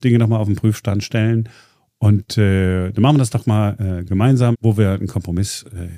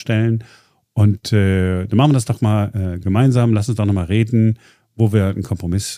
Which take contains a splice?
first; 1 cut; at 4.5 s

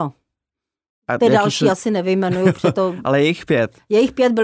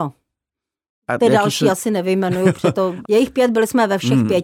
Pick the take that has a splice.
second; 1 cut; at 3.0 s

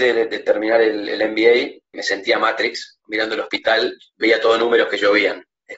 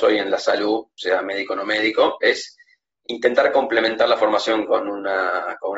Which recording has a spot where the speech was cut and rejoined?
first; 2 cuts; at 1.9 s, 3.0 s

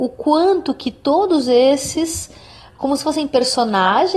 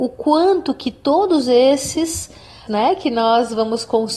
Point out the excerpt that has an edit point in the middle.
second; 1 cut; at 2.7 s

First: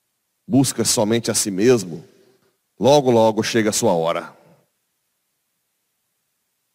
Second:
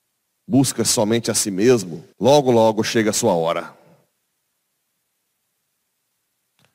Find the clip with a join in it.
second; 1 cut; at 2.1 s

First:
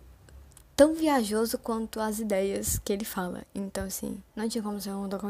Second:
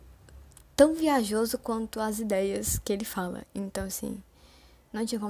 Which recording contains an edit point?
first; 1 cut; at 4.3 s

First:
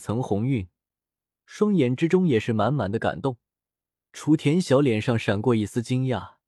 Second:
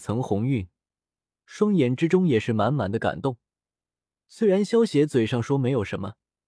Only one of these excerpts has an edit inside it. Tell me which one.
first; 1 cut; at 4.0 s

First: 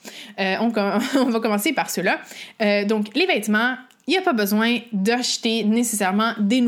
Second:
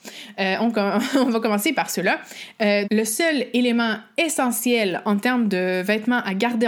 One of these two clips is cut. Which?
second; 1 cut; at 2.8 s

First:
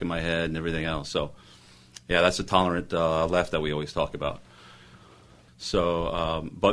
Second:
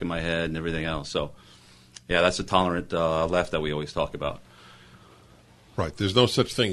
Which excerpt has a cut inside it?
first; 1 cut; at 5.5 s

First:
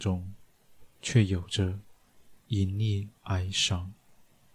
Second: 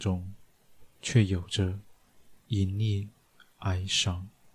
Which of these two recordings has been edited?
first; 1 cut; at 3.2 s

